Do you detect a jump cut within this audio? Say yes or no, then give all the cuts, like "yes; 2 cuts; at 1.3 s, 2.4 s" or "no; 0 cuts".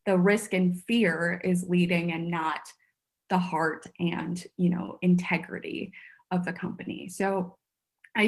no; 0 cuts